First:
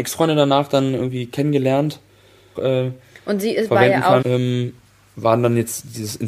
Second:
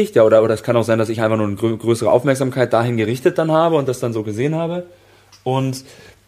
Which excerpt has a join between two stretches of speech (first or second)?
first